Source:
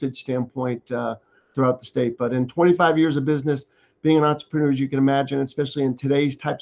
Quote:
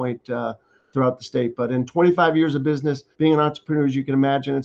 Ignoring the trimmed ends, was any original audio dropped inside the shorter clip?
yes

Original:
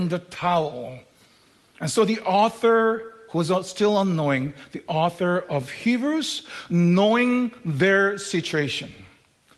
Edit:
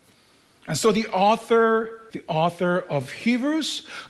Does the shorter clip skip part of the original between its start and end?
yes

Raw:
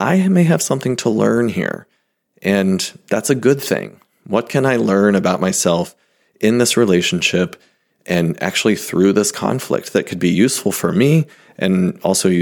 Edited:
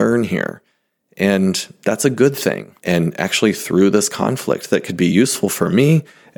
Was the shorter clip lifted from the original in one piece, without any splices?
no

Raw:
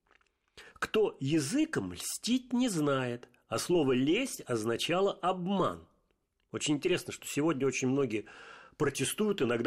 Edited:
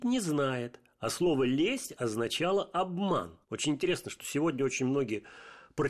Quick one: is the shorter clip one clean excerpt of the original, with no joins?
no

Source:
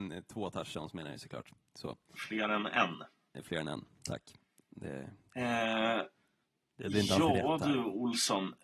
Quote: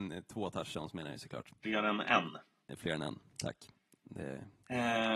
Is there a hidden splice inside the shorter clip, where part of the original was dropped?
yes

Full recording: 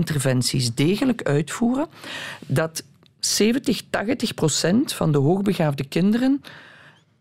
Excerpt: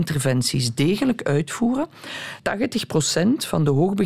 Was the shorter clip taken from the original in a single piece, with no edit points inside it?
no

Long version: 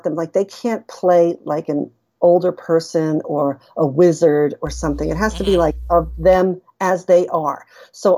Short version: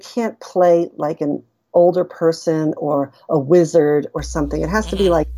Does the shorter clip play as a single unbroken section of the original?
yes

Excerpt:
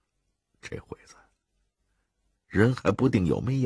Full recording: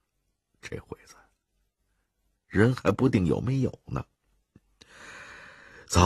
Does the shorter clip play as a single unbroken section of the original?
yes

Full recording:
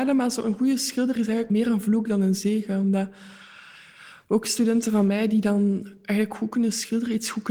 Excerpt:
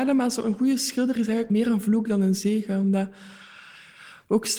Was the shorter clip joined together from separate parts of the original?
no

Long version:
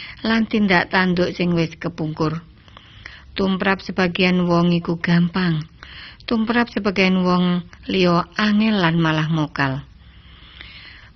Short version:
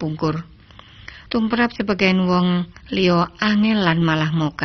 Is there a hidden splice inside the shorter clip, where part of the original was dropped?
yes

